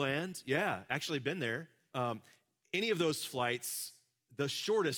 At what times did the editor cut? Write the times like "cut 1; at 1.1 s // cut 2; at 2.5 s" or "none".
cut 1; at 1.9 s